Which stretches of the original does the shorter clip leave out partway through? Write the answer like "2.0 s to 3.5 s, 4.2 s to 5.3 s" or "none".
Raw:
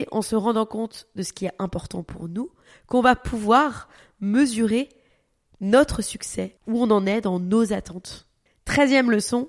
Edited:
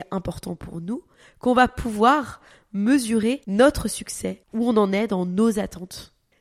4.9 s to 5.6 s